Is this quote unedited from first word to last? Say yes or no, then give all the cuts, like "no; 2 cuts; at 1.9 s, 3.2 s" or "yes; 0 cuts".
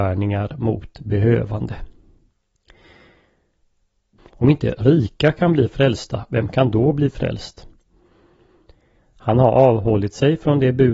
no; 2 cuts; at 4.2 s, 9.0 s